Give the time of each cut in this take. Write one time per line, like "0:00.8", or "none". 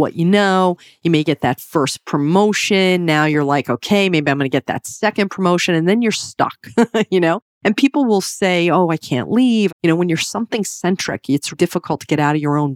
0:09.7
0:11.5